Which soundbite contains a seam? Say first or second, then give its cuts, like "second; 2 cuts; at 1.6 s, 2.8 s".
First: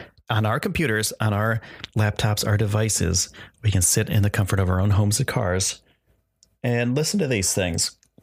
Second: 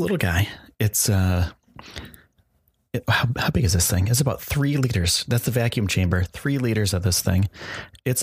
first; 1 cut; at 1.9 s